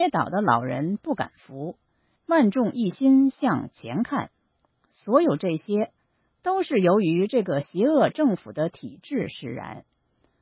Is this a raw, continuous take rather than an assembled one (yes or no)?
yes